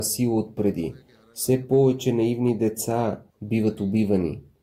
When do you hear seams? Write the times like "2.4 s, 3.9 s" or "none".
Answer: 3.3 s